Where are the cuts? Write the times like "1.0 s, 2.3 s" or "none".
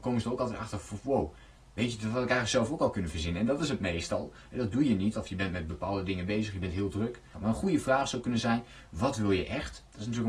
5.1 s, 7.3 s